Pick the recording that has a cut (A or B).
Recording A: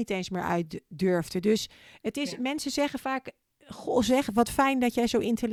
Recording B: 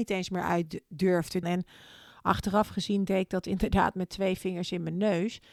B